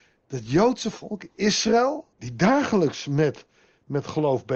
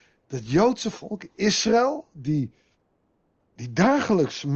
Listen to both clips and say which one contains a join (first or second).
first